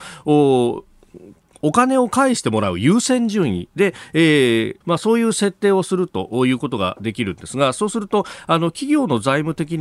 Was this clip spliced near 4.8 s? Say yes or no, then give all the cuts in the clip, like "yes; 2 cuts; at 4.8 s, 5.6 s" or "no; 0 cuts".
yes; 1 cut; at 4.8 s